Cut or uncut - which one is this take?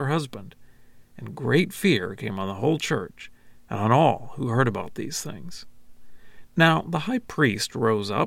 cut